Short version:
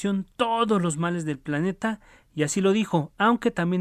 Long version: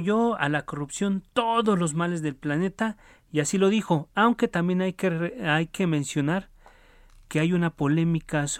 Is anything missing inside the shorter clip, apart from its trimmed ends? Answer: no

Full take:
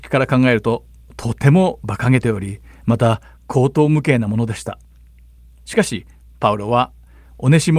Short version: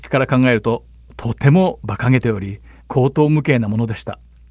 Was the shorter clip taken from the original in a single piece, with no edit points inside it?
no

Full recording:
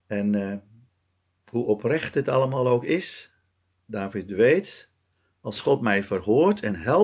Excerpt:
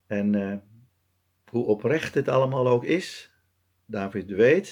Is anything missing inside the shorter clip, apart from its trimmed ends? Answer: no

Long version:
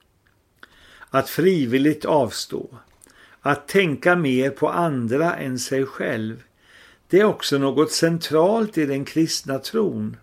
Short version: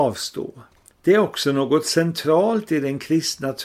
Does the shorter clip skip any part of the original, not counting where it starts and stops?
yes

